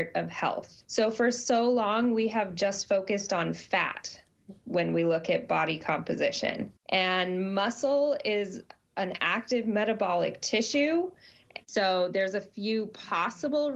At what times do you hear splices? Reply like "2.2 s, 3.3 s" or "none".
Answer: 6.8 s, 11.6 s